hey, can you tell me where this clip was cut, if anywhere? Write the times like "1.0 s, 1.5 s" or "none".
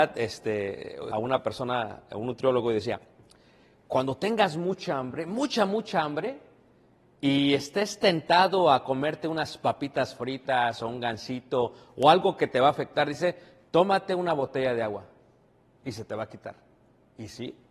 1.1 s